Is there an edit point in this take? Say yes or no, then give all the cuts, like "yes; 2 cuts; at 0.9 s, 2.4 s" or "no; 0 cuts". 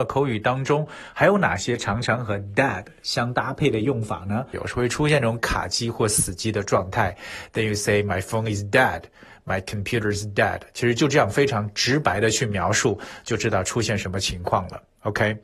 yes; 1 cut; at 4.5 s